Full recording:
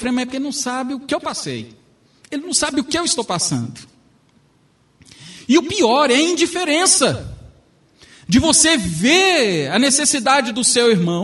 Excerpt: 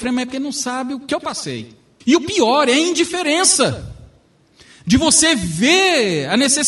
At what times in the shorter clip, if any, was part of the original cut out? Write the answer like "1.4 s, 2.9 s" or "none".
2.0 s

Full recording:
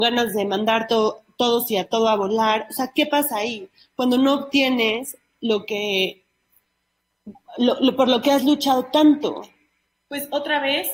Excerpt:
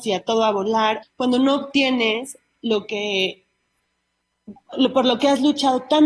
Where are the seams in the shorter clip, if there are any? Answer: 1.0 s, 4.7 s

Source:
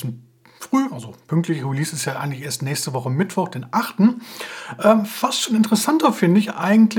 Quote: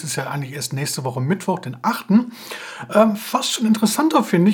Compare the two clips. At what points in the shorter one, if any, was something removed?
none

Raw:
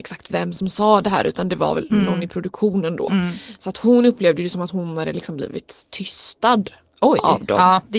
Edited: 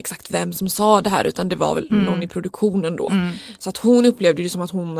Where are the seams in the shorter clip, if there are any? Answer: none

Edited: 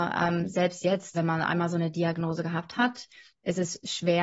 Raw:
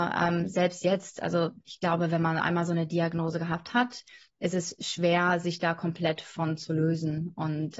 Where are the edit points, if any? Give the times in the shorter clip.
1.1 s

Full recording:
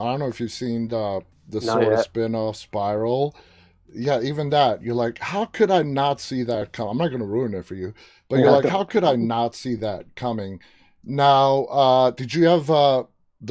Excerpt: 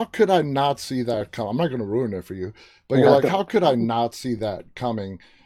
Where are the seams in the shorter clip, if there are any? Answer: none

